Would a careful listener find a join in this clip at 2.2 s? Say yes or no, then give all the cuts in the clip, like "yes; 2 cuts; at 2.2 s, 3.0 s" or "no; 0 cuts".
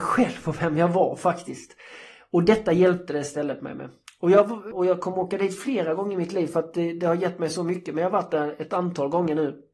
no; 1 cut; at 4.7 s